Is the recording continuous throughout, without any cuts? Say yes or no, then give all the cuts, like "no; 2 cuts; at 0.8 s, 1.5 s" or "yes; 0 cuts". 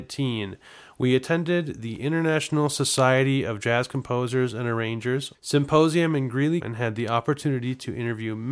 no; 2 cuts; at 5.3 s, 6.6 s